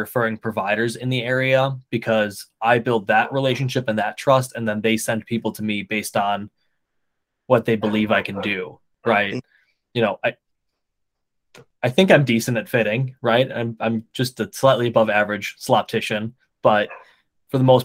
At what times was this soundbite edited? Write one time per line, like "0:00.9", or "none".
none